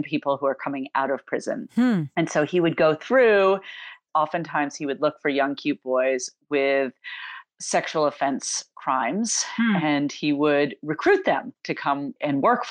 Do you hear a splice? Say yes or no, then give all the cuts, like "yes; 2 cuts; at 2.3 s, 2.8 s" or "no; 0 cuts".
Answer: no; 0 cuts